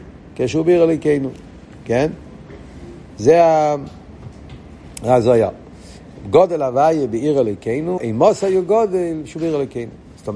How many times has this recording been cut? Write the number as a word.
one